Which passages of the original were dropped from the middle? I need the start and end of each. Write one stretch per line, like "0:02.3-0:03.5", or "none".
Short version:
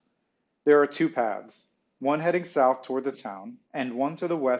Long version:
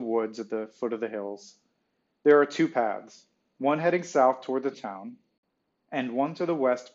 0:05.2-0:05.8